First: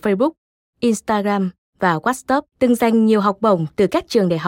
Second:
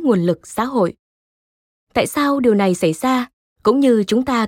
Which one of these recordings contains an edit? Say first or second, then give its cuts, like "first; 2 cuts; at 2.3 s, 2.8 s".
first; 1 cut; at 2.5 s